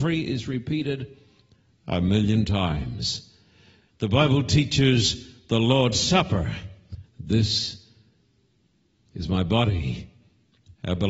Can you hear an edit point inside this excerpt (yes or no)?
yes